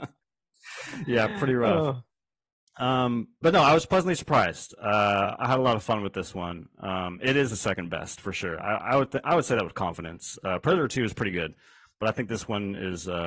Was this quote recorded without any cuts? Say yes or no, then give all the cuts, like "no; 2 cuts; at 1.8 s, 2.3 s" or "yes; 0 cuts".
yes; 0 cuts